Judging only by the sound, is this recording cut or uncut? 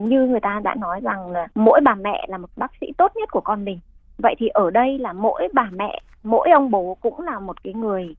cut